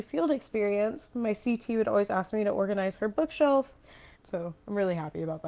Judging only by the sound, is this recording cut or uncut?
cut